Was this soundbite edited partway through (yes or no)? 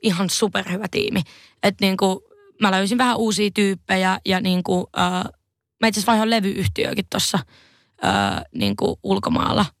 no